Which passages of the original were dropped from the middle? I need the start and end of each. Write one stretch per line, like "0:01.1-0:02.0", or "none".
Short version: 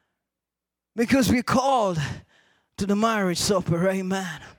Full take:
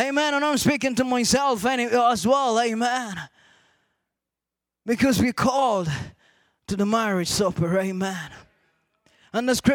none